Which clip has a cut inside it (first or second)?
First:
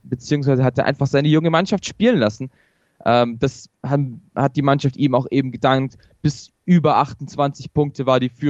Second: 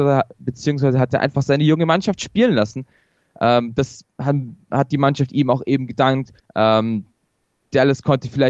second